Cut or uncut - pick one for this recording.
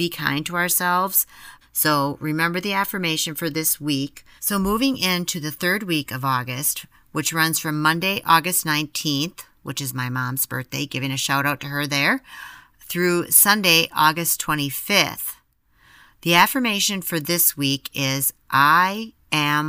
cut